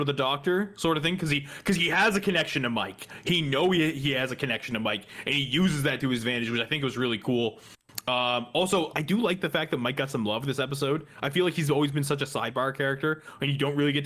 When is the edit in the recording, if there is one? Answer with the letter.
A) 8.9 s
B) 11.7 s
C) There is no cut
A